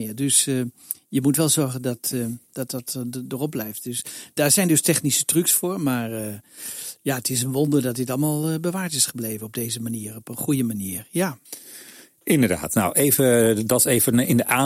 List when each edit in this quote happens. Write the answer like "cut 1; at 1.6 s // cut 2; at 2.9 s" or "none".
none